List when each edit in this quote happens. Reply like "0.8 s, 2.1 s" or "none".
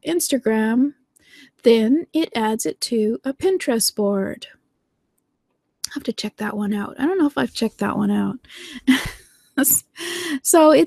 none